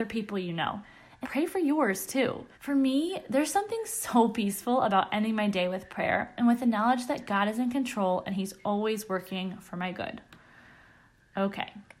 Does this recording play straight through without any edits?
no; 2 cuts; at 1.2 s, 2.5 s

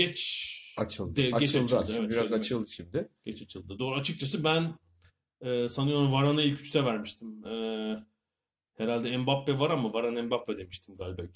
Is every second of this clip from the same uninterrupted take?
yes; 0 cuts

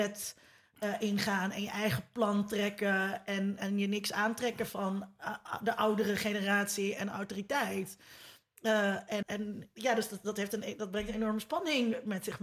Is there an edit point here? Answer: yes; 1 cut; at 9.2 s

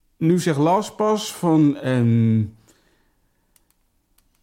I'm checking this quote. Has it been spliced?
no; 0 cuts

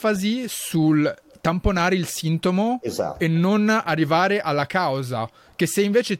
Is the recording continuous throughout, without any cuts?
yes; 0 cuts

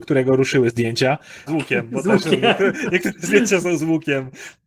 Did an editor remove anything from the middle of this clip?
yes; 1 cut; at 1.5 s

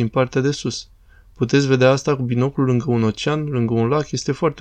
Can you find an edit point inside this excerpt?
no; 0 cuts

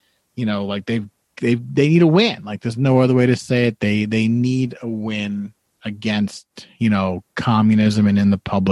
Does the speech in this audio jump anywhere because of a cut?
no; 0 cuts

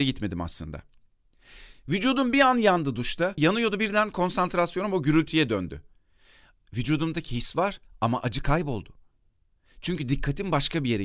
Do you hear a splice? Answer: yes; 1 cut; at 3.4 s

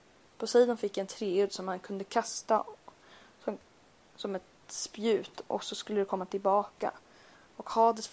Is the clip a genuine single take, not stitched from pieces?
yes; 0 cuts

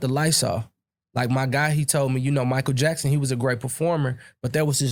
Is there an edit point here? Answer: no; 0 cuts

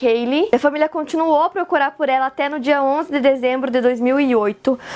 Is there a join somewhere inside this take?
no; 0 cuts

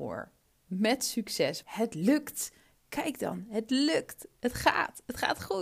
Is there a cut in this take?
yes; 1 cut; at 1.6 s

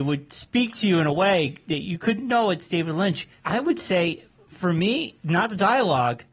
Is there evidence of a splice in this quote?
no; 0 cuts

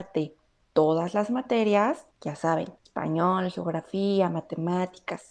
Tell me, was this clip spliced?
no; 0 cuts

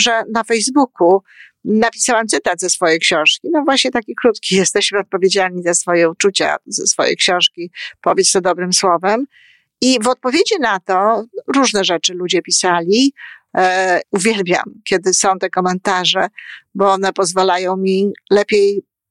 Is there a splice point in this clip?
yes; 1 cut; at 14.0 s

